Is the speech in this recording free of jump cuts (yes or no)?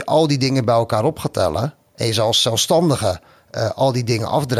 yes